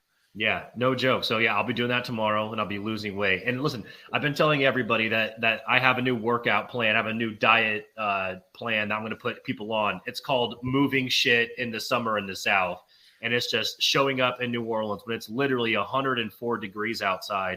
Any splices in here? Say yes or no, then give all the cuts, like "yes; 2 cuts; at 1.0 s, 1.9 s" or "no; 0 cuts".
no; 0 cuts